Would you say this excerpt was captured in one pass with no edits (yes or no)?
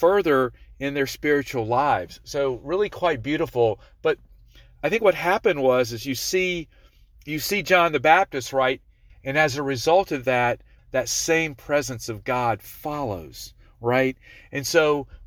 no